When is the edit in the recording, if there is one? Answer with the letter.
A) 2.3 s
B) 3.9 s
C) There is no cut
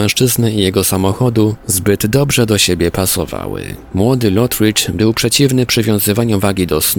B